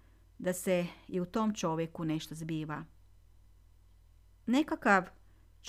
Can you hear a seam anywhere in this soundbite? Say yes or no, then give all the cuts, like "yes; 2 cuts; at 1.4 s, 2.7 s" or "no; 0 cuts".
no; 0 cuts